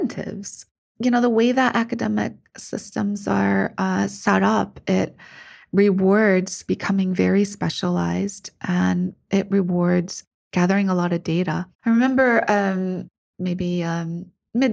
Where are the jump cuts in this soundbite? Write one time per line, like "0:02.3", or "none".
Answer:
0:11.7
0:13.3